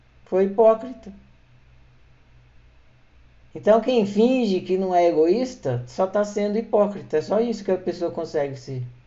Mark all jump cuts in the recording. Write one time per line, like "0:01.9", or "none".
none